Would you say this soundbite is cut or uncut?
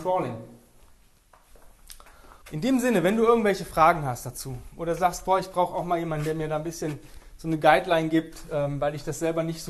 cut